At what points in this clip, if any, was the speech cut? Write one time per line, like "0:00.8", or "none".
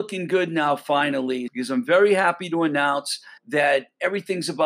0:01.5
0:03.4